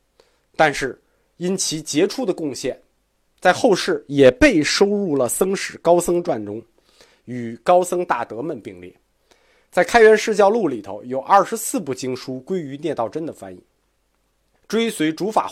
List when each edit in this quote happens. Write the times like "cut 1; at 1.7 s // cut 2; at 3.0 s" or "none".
cut 1; at 14.5 s